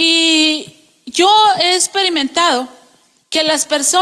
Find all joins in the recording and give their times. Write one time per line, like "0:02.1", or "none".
none